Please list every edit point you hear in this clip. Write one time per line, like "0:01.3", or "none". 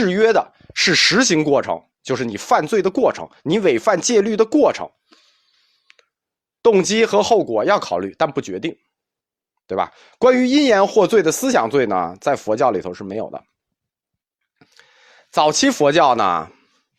none